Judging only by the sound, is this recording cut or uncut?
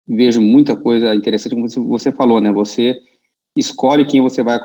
uncut